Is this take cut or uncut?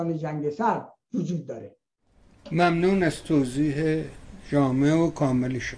uncut